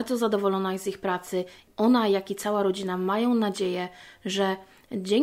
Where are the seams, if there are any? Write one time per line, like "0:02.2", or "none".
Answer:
none